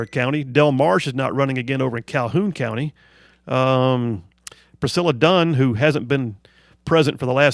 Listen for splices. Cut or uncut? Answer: uncut